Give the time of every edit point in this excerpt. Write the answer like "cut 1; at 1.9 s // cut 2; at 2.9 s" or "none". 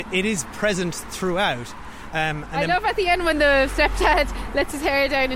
cut 1; at 2.1 s